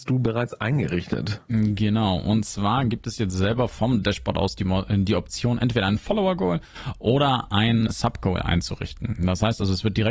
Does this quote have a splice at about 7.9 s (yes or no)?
yes